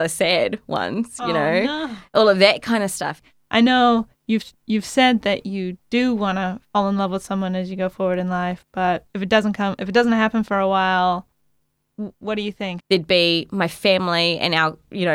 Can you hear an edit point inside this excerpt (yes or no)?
yes